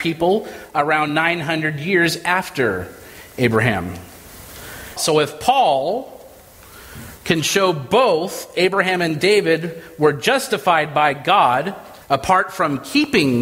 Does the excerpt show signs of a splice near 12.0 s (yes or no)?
yes